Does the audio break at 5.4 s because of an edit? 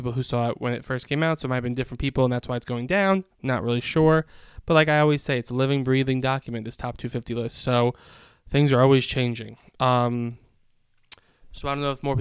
no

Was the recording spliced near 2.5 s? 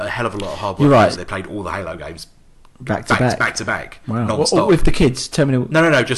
no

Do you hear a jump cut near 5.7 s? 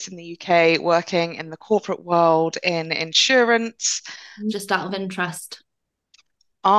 no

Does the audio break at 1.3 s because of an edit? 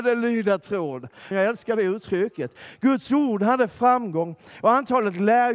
yes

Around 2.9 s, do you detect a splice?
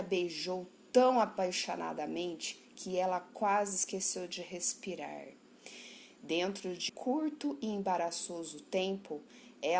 no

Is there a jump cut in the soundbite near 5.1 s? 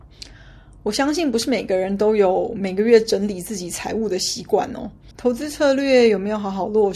yes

